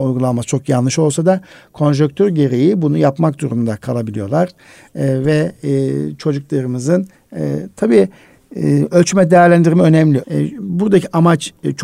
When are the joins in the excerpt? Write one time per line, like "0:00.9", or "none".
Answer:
0:10.2